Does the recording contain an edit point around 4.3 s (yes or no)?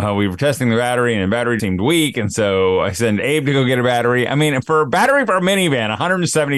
no